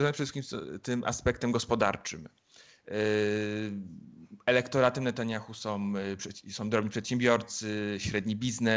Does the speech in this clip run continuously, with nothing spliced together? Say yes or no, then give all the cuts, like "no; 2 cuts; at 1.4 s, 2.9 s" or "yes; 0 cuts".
yes; 0 cuts